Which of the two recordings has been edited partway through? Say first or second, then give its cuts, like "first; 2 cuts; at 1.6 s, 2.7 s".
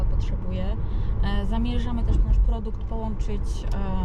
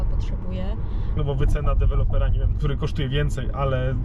second; 2 cuts; at 1.2 s, 2.5 s